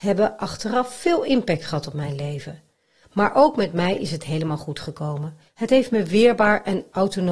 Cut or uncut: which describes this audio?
uncut